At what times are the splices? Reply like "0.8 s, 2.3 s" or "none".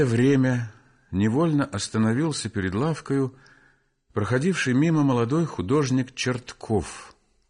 none

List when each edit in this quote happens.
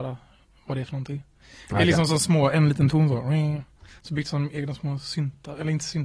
4.0 s

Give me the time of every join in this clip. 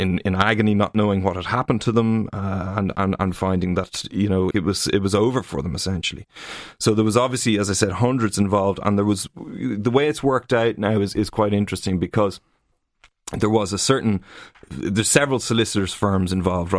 4.5 s

